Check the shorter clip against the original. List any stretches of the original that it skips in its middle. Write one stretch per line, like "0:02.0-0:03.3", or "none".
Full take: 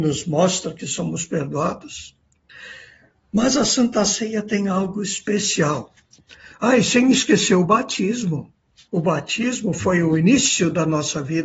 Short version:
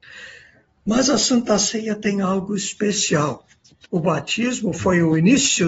0:06.3-0:08.9